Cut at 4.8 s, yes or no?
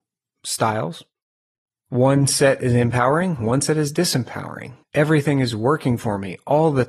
yes